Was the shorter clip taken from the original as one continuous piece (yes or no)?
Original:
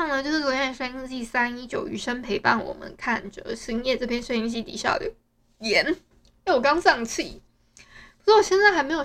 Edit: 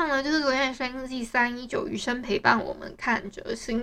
yes